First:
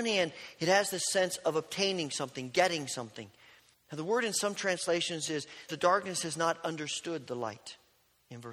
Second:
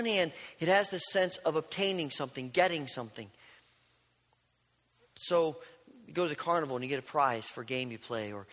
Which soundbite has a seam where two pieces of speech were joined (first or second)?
first